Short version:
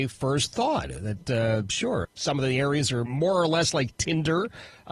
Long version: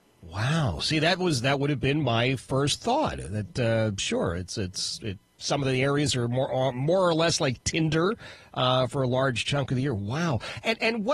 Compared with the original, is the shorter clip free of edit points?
no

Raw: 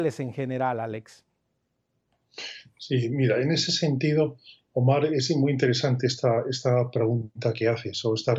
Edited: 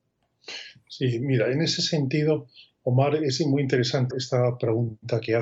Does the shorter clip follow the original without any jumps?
no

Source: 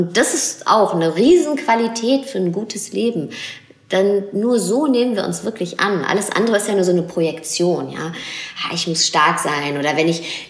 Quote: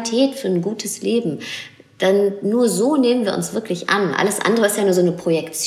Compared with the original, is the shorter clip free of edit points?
yes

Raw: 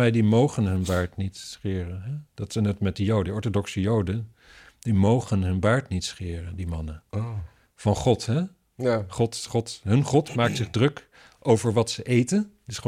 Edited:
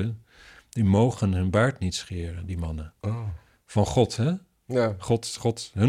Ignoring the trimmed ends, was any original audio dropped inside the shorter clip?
no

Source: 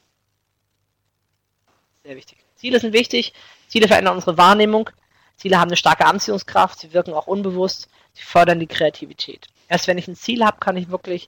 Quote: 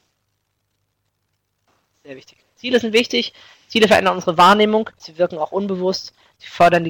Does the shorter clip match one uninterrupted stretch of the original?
no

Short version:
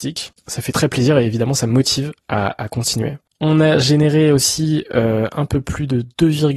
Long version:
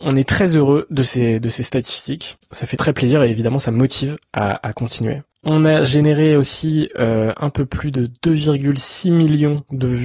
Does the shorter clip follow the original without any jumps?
yes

